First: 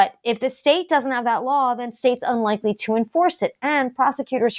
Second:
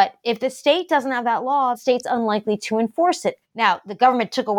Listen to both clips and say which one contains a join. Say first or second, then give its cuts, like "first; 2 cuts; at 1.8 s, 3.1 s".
second; 2 cuts; at 1.7 s, 3.4 s